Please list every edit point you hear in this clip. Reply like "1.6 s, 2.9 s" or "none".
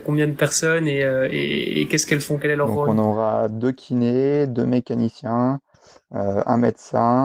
none